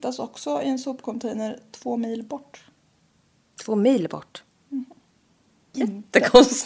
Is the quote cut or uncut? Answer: cut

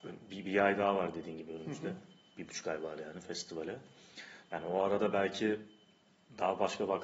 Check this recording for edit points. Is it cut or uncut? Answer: uncut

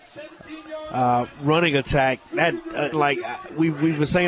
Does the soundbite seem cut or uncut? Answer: cut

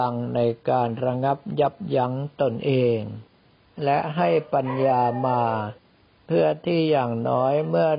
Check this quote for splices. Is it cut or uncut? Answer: uncut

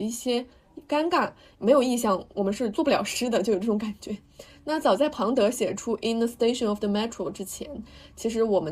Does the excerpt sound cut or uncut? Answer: cut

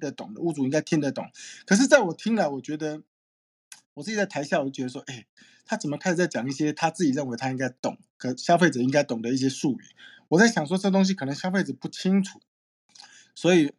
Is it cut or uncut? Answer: uncut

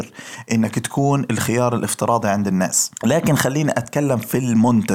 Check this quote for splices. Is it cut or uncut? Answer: cut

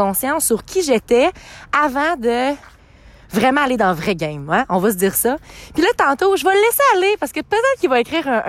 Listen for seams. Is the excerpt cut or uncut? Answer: uncut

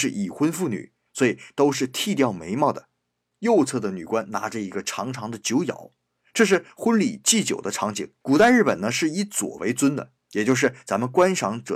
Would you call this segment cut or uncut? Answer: cut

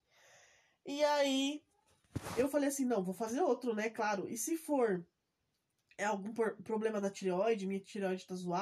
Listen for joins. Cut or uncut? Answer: uncut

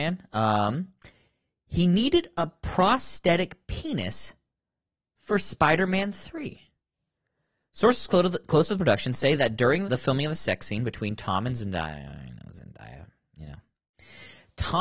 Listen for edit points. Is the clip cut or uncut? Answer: cut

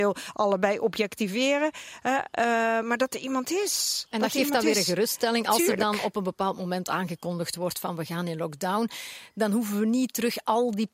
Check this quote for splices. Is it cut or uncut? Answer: uncut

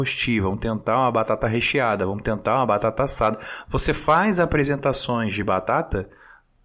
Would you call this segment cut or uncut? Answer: uncut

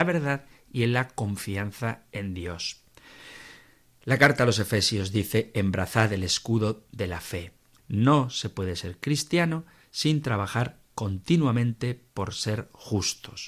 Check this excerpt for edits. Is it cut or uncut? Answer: cut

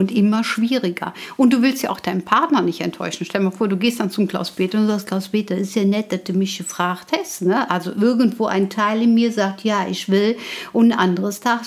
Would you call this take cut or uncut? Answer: uncut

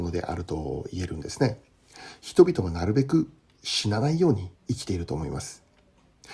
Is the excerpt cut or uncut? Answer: cut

